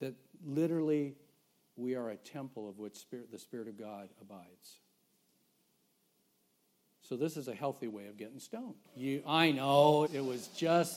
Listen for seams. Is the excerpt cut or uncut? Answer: cut